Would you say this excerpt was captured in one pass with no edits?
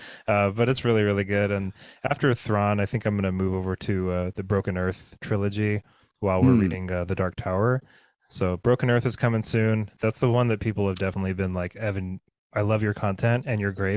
yes; 0 cuts

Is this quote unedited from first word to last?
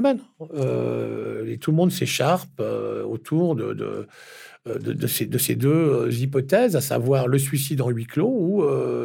yes; 0 cuts

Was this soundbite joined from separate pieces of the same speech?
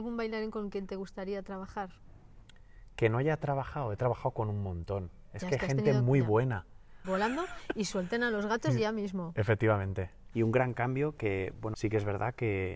yes; 3 cuts; at 7.0 s, 10.3 s, 11.7 s

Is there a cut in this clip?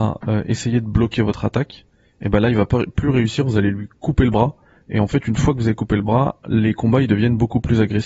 no; 0 cuts

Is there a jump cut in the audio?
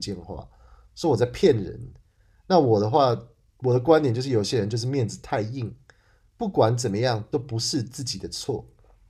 no; 0 cuts

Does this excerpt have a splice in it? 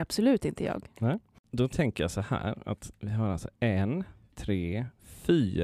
yes; 1 cut; at 4.3 s

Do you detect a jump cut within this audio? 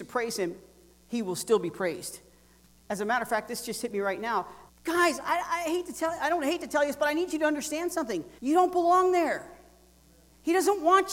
yes; 2 cuts; at 4.7 s, 8.4 s

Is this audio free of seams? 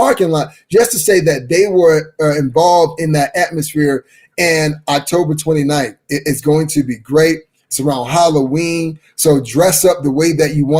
yes; 0 cuts

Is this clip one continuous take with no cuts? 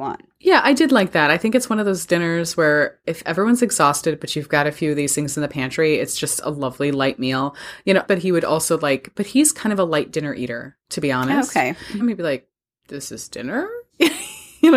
no; 2 cuts; at 8.1 s, 12.0 s

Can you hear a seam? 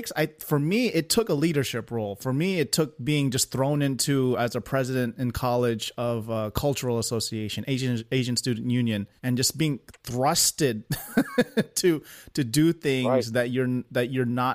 yes; 1 cut; at 9.2 s

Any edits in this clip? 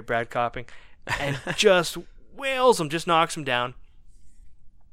no; 0 cuts

